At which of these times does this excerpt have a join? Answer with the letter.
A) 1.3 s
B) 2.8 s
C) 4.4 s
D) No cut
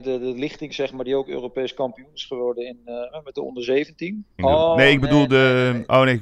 C